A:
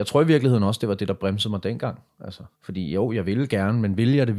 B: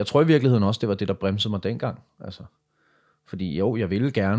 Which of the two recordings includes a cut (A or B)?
A